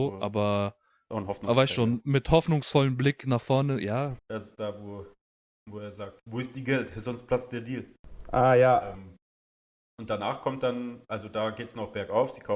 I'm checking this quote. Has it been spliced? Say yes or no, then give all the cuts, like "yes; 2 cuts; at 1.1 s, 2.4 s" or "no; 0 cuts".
yes; 1 cut; at 4.2 s